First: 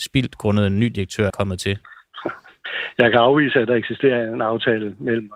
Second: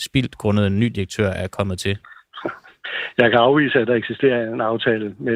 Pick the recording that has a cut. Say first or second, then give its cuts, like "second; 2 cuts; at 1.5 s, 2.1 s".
first; 1 cut; at 1.3 s